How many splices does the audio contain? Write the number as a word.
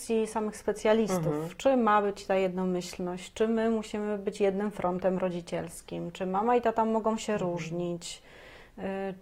zero